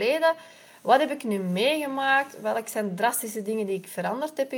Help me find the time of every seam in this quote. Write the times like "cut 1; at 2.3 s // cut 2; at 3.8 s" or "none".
none